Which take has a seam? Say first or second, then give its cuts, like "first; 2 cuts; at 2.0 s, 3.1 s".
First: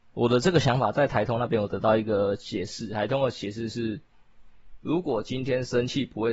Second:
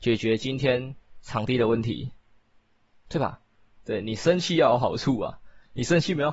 second; 1 cut; at 3.8 s